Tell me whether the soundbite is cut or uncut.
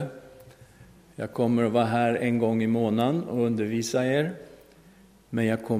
uncut